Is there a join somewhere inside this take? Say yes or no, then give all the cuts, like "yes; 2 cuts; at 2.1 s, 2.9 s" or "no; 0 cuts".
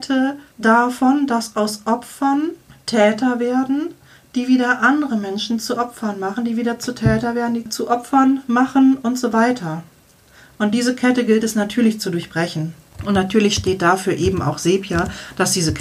no; 0 cuts